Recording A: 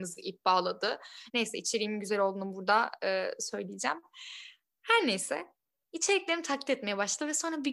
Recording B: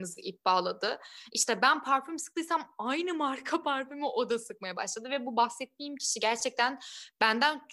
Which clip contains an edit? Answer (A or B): A